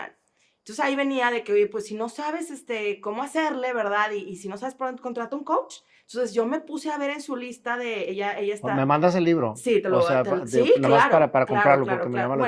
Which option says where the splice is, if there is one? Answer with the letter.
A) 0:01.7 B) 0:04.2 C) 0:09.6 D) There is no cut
D